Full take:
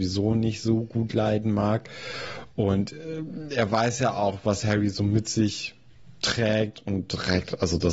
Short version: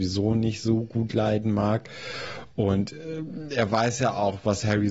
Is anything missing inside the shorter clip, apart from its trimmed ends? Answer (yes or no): no